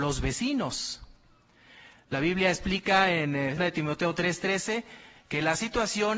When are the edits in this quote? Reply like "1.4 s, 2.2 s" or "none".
3.6 s